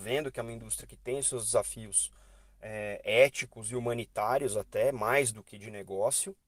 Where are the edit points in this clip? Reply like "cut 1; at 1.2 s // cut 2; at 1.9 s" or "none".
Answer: none